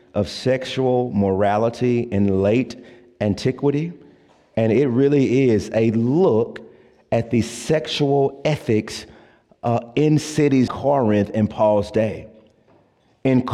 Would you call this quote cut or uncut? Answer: cut